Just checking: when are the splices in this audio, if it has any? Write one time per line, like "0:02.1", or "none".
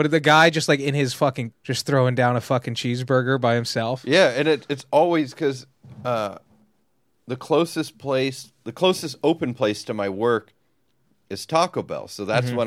0:01.5